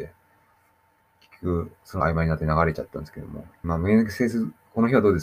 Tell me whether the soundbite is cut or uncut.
cut